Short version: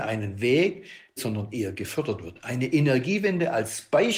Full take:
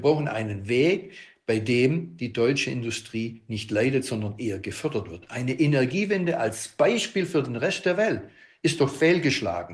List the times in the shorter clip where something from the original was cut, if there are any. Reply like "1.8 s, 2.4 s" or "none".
1.2 s